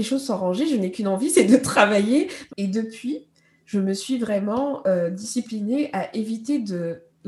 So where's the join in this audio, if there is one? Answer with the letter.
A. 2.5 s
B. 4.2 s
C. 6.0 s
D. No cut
A